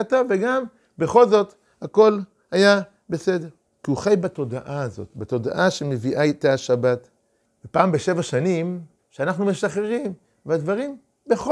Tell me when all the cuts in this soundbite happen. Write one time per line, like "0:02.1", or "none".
0:03.8
0:07.5
0:09.0